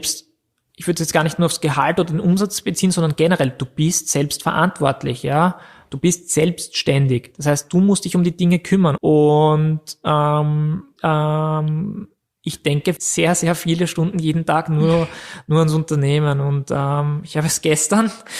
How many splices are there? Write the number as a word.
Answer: three